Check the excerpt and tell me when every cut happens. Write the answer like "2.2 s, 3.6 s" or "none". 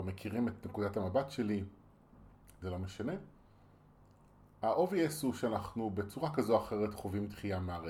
2.6 s